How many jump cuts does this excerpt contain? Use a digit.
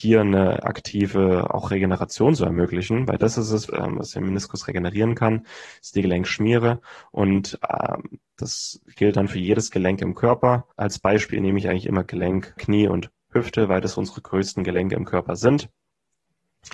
3